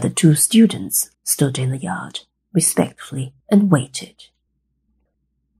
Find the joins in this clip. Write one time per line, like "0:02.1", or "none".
0:01.1
0:03.4